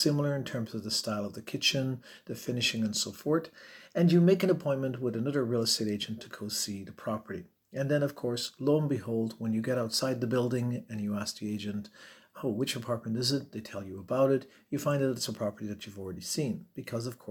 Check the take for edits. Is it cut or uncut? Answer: uncut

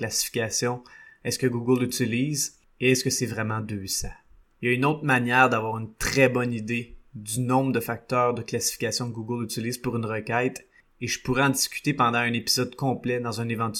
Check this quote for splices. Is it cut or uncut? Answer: cut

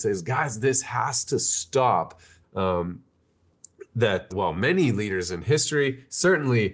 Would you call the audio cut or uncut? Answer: cut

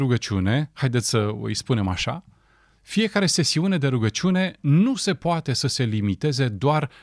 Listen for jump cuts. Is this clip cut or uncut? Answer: uncut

